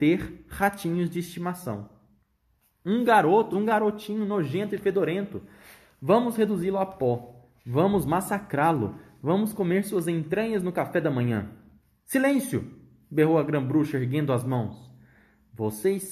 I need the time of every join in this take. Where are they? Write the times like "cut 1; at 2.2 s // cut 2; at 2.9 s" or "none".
cut 1; at 3.5 s